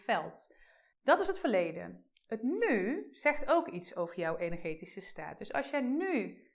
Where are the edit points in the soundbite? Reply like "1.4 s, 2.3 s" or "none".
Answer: 0.9 s